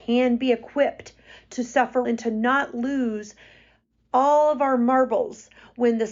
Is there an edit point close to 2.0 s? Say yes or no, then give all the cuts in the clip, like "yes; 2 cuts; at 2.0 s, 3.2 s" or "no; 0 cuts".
yes; 1 cut; at 2.0 s